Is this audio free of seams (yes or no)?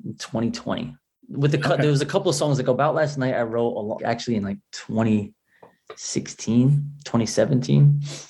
no